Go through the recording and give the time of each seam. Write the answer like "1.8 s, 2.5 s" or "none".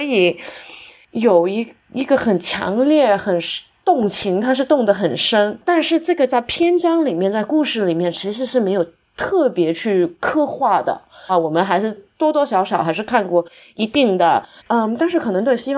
11.3 s, 14.6 s